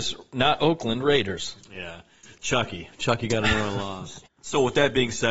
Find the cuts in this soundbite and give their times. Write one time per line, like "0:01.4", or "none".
0:04.3